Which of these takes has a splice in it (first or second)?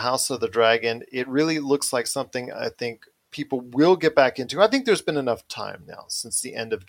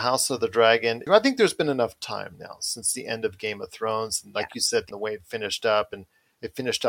second